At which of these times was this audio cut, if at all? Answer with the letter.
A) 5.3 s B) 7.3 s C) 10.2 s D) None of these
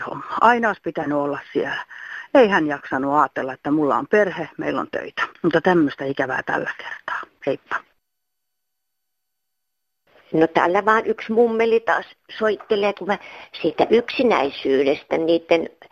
A